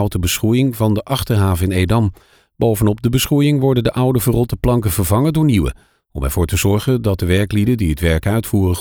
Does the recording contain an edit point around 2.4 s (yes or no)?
no